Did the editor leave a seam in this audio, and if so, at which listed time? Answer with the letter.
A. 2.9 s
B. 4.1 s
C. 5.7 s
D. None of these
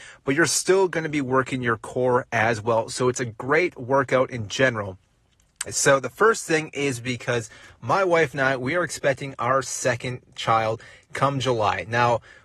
C